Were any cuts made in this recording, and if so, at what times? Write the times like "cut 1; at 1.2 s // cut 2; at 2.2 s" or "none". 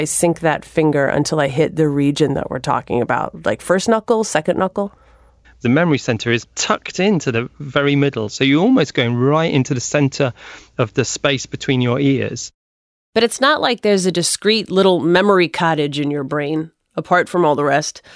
cut 1; at 5.4 s